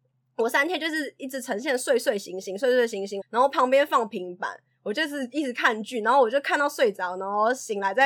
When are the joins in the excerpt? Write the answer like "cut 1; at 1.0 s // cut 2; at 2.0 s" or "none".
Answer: cut 1; at 3.2 s